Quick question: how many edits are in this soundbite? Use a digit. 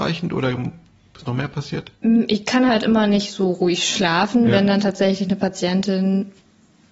1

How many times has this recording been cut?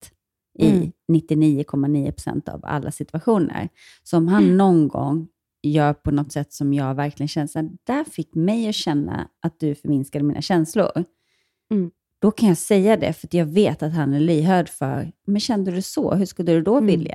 1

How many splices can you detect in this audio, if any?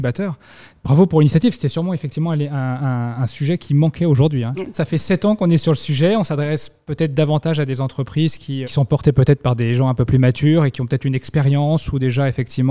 2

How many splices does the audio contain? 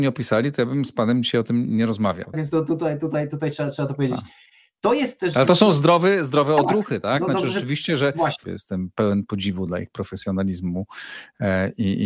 2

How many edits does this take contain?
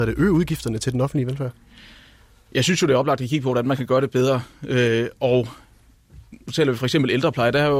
0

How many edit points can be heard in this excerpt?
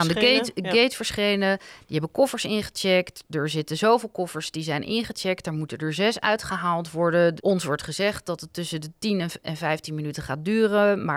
2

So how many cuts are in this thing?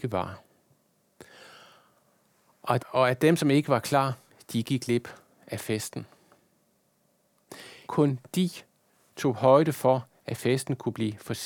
2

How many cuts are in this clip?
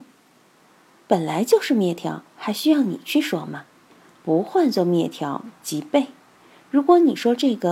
0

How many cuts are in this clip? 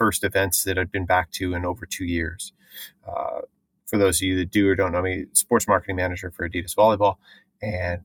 0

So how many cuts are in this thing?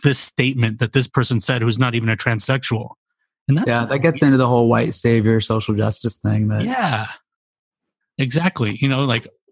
0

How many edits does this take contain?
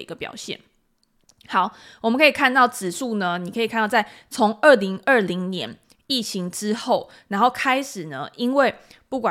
0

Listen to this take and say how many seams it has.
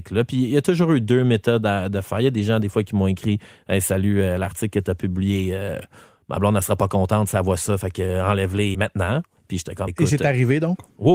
2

